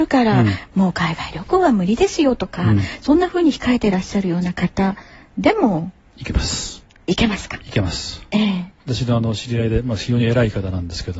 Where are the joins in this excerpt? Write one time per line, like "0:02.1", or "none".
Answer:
none